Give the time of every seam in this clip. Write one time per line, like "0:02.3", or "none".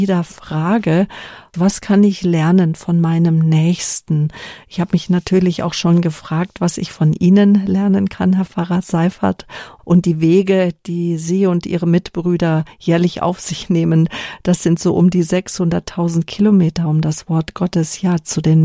0:09.8